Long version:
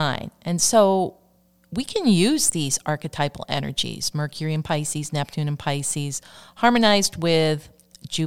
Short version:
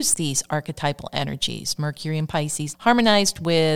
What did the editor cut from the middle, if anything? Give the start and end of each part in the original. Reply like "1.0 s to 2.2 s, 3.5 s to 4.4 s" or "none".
5.1 s to 6.5 s